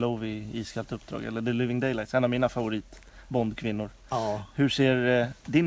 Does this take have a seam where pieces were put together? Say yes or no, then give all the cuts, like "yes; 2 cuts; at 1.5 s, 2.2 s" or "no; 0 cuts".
no; 0 cuts